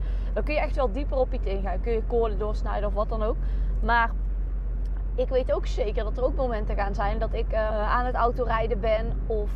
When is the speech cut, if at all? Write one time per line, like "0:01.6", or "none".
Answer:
0:07.7